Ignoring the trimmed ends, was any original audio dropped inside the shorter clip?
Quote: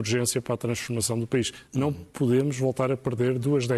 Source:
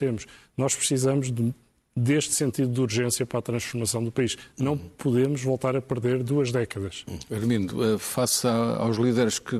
no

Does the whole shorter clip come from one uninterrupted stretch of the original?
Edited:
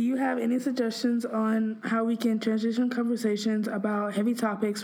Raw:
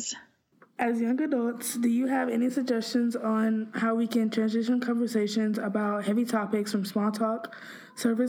yes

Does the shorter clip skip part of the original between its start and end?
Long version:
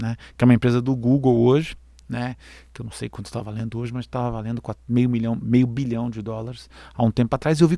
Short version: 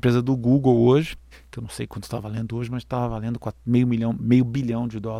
yes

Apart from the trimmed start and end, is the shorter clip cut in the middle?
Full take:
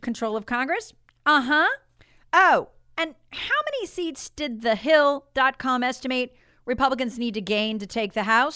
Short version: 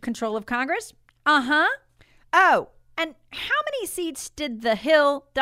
no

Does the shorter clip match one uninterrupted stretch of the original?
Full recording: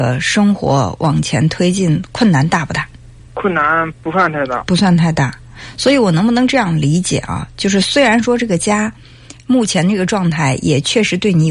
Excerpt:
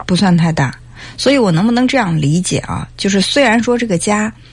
yes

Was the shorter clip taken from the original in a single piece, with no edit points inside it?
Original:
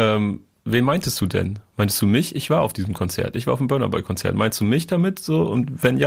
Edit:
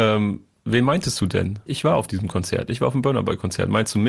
no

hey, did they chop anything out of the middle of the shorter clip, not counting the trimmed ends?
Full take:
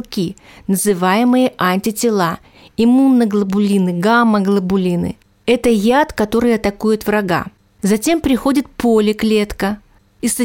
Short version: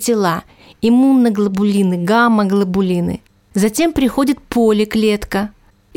yes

